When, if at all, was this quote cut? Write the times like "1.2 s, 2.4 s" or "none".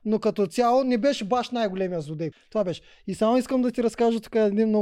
2.3 s